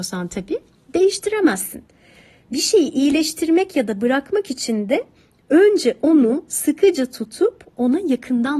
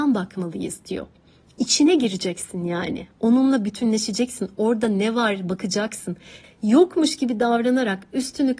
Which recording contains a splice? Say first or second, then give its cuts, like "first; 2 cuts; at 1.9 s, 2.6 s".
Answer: second; 1 cut; at 6.4 s